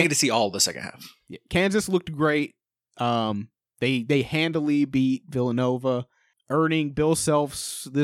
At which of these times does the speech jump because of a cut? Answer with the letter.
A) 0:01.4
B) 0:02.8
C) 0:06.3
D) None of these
C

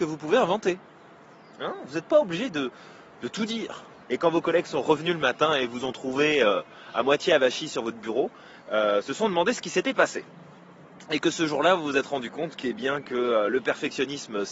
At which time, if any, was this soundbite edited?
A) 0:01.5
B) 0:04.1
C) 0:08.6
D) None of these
B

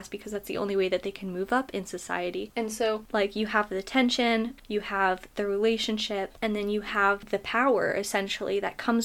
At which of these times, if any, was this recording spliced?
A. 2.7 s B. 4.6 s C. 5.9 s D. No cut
B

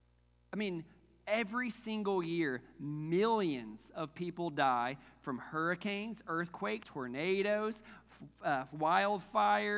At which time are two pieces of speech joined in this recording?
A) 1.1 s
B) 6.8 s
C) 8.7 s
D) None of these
B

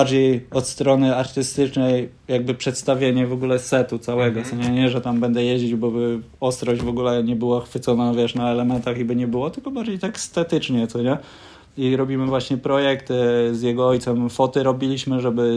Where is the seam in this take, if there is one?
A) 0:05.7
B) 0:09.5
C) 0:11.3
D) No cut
D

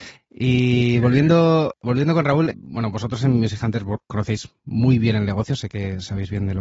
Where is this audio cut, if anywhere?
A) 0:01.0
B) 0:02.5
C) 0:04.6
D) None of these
B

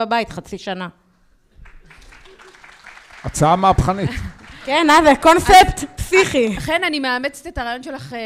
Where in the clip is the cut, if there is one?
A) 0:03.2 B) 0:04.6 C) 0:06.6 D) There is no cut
D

